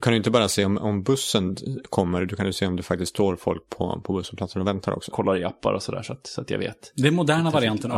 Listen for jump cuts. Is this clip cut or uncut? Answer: cut